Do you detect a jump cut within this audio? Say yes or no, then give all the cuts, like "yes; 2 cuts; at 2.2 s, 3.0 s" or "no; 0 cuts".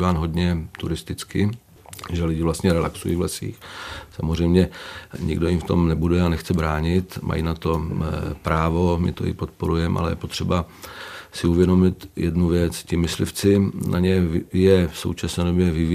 no; 0 cuts